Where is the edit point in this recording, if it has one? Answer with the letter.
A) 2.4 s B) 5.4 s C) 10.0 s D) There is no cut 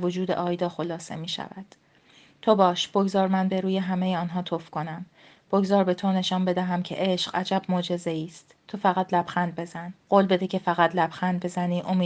C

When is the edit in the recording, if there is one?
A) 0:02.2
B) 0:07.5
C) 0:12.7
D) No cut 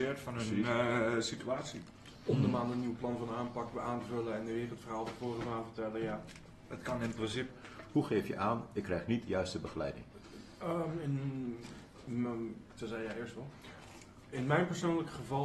B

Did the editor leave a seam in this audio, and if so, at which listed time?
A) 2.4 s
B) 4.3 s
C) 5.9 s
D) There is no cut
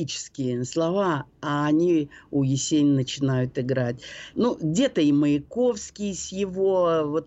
B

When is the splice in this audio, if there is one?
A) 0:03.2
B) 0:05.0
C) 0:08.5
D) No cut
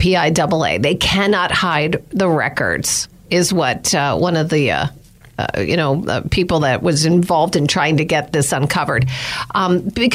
D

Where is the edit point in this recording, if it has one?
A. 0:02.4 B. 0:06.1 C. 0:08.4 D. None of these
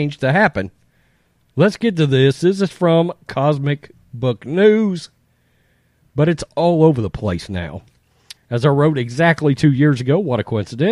C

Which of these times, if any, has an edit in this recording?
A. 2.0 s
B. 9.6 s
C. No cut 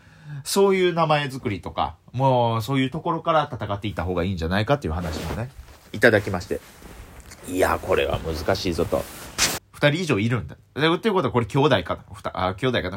B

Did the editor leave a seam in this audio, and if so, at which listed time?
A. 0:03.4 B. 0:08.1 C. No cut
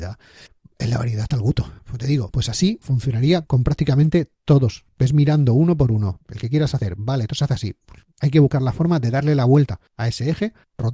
A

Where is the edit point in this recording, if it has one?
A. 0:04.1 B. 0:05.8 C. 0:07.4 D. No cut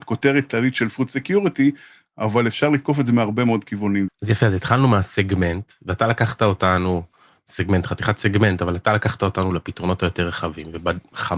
A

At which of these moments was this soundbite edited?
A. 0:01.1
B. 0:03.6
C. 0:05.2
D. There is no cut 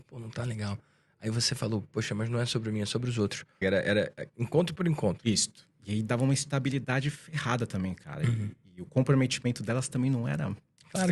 B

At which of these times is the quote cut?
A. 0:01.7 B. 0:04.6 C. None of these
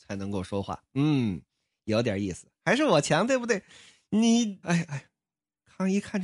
B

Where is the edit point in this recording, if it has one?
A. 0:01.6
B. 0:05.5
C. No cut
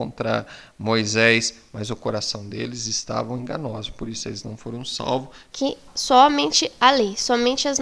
B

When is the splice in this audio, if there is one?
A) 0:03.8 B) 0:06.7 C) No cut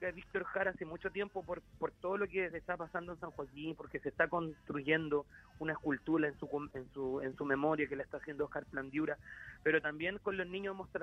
B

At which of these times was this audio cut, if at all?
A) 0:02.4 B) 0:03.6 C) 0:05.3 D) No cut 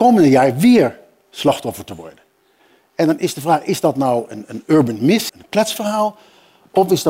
C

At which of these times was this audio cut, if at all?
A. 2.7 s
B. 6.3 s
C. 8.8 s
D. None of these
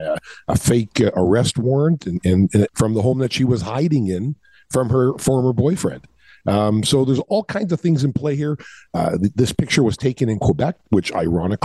A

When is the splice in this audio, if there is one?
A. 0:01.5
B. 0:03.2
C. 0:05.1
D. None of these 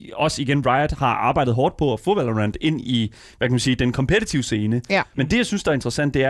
C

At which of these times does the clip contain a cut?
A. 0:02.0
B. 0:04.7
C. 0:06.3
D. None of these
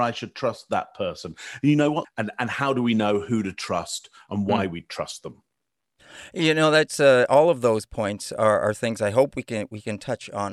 A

